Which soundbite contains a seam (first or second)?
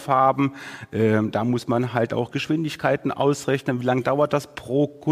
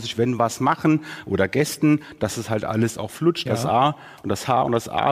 second